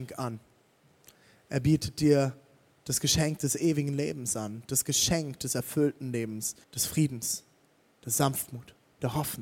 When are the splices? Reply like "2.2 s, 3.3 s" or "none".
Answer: 6.6 s